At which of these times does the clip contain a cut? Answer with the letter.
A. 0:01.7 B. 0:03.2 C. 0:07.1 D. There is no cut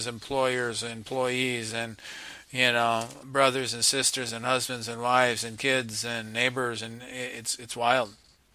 B